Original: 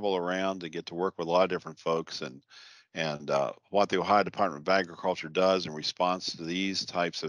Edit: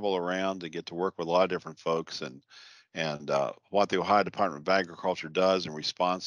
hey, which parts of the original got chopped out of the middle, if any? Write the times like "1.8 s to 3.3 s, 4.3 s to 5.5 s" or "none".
none